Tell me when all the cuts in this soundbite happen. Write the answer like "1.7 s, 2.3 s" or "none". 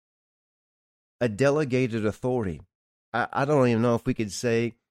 3.1 s